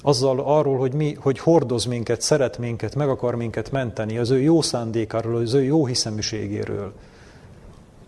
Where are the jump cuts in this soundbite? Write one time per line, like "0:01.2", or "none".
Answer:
none